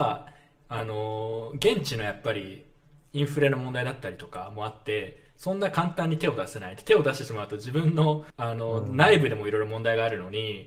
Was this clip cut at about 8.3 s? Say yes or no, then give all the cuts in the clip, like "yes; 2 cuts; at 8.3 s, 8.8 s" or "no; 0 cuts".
yes; 1 cut; at 8.3 s